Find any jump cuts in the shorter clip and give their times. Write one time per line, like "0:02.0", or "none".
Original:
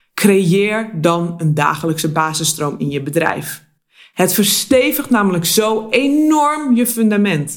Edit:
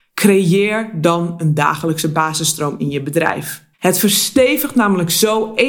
0:03.7